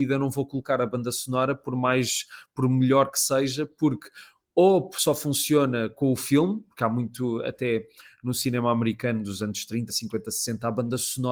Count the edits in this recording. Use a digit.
1